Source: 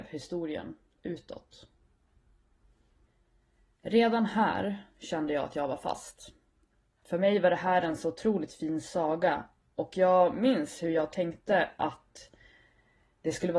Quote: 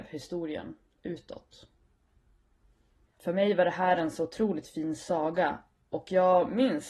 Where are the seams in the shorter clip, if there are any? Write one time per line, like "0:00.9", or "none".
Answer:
0:03.1